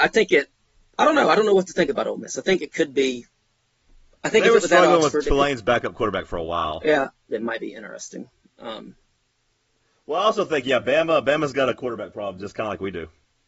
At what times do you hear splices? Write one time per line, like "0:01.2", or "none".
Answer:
0:07.3